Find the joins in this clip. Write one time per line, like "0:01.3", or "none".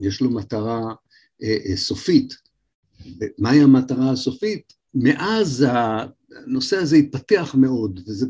0:04.9